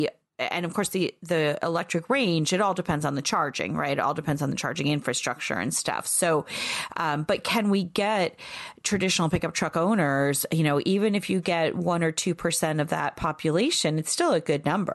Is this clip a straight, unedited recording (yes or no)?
yes